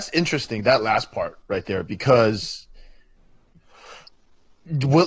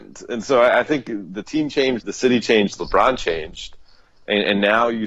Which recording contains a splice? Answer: second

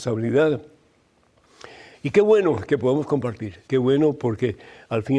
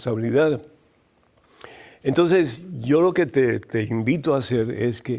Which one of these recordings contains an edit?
first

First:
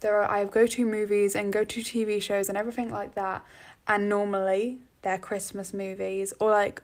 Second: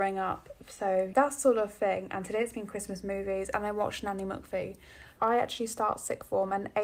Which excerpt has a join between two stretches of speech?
second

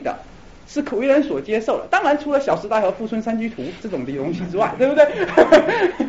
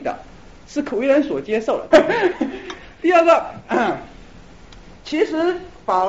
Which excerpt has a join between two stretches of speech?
second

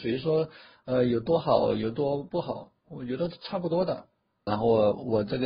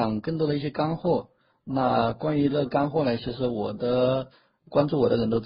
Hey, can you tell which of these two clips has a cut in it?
first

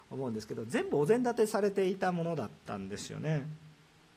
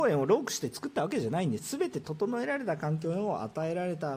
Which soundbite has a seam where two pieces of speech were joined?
second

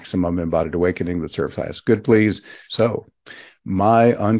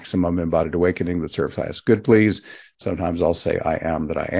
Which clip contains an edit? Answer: first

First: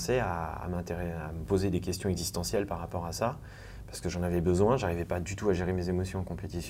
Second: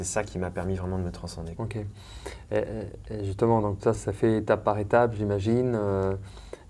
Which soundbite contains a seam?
second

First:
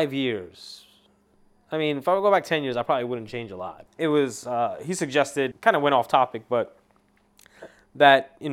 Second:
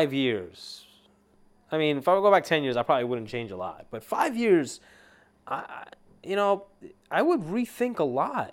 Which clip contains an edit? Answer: first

